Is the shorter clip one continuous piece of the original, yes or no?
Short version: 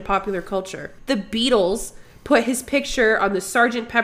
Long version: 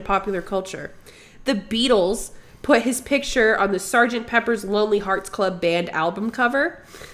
no